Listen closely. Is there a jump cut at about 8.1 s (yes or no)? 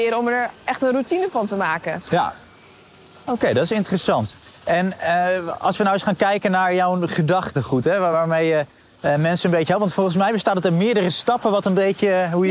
no